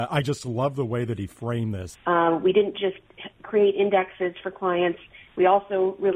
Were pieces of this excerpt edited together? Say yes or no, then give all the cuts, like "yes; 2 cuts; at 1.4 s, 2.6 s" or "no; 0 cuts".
yes; 1 cut; at 1.9 s